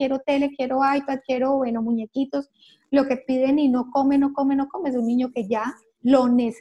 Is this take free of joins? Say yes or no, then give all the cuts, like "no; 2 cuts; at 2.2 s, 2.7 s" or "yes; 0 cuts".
yes; 0 cuts